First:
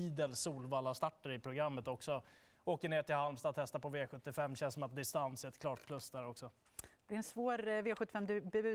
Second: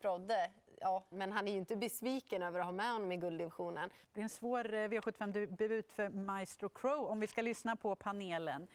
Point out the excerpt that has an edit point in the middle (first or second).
second